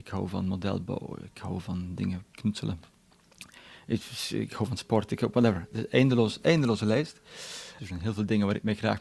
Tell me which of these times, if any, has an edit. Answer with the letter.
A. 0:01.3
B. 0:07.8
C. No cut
B